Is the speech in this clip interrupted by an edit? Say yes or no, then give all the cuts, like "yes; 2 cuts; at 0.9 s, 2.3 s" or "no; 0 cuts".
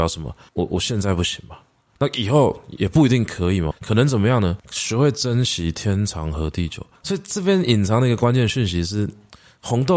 yes; 2 cuts; at 3.7 s, 6.9 s